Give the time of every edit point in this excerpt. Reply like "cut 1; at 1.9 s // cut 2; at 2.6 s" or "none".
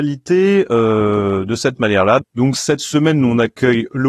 cut 1; at 2.2 s